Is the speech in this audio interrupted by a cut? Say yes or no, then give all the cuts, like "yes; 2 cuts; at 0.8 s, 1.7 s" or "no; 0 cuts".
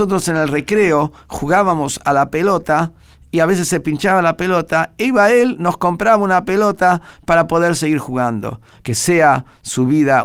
yes; 1 cut; at 8.8 s